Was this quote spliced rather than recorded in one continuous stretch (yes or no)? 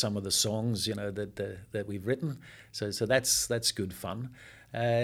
no